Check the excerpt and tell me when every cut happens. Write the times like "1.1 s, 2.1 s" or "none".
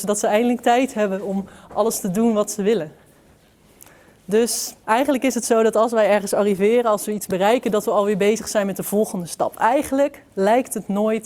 4.8 s